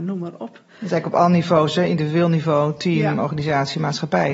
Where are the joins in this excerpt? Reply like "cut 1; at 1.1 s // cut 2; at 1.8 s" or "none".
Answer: none